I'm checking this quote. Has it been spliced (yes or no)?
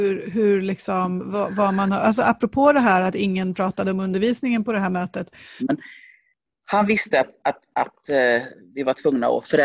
yes